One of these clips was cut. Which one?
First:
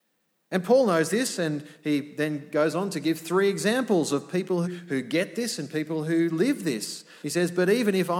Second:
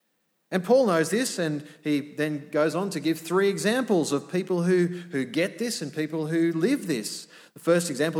first; 2 cuts; at 4.6 s, 7.2 s

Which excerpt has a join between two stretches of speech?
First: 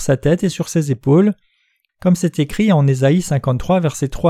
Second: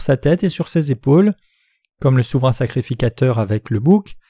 first; 1 cut; at 1.9 s

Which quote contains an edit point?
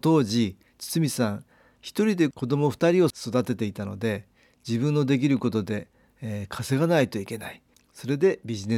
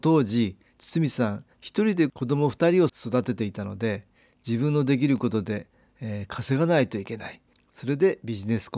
second; 1 cut; at 1.5 s

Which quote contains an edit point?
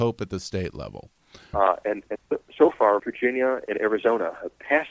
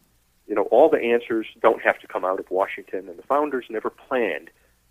first; 2 cuts; at 1.5 s, 3.0 s

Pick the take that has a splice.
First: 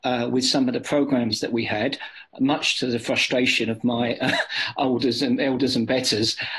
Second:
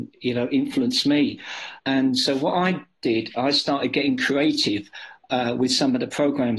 second; 1 cut; at 1.8 s

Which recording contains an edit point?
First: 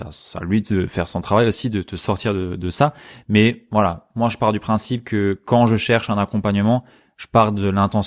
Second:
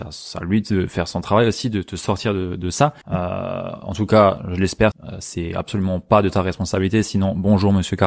second; 2 cuts; at 3.0 s, 4.9 s

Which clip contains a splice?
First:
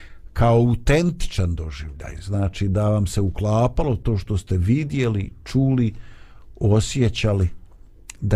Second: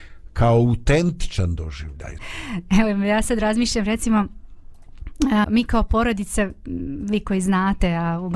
second; 2 cuts; at 2.2 s, 5.4 s

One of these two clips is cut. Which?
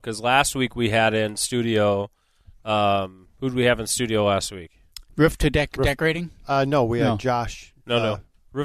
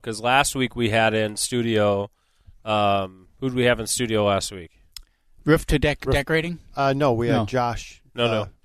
first; 1 cut; at 5.1 s

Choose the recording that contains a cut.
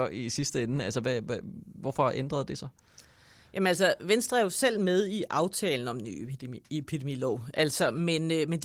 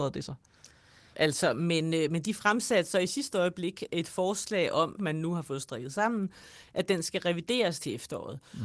second; 2 cuts; at 1.1 s, 5.0 s

